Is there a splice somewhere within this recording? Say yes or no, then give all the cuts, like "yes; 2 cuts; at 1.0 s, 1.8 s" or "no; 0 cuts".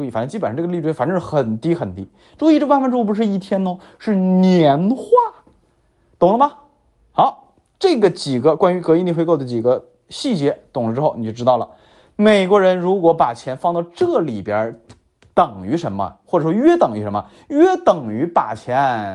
no; 0 cuts